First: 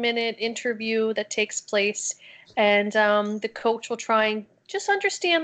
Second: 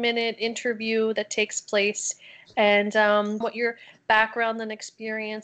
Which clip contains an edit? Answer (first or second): second